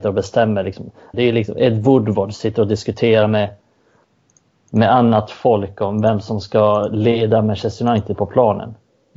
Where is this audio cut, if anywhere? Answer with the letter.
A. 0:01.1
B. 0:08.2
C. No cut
A